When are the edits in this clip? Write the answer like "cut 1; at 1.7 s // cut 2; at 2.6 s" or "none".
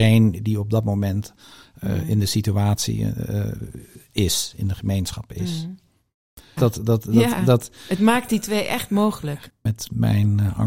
cut 1; at 6.6 s // cut 2; at 9.5 s